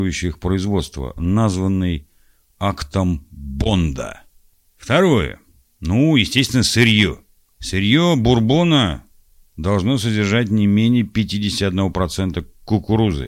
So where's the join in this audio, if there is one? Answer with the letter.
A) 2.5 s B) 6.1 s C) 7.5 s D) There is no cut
D